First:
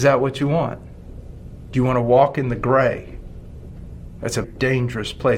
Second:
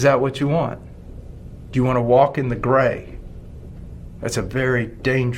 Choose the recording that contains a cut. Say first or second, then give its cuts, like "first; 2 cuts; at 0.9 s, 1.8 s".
first; 1 cut; at 4.4 s